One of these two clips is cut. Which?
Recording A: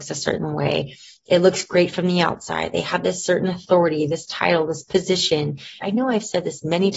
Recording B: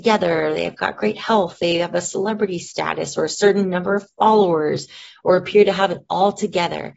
A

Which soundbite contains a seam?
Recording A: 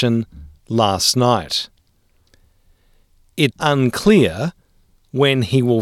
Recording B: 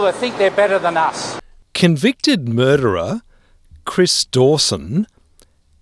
A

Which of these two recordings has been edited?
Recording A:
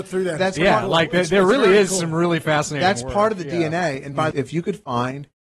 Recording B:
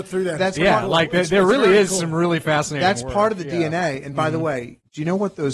A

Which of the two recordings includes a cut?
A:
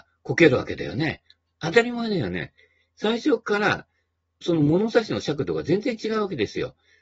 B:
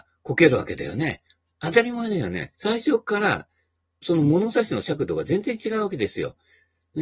B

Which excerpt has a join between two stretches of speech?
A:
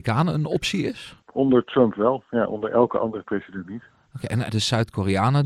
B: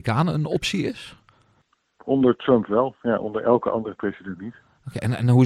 A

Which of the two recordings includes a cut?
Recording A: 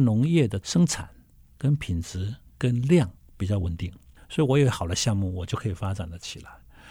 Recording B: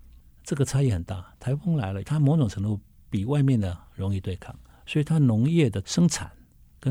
B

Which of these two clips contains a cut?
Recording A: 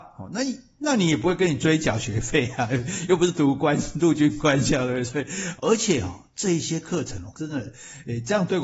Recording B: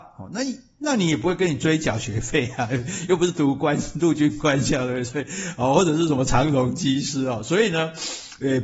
A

